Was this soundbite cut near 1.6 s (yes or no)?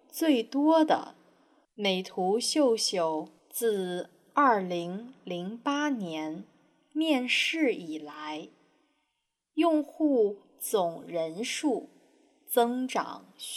yes